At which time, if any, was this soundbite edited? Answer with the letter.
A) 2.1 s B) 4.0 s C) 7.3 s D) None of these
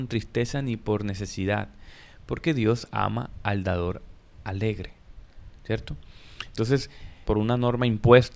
C